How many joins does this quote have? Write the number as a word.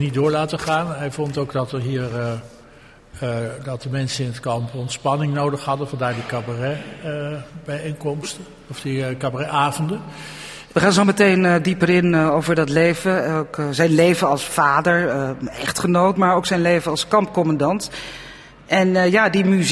one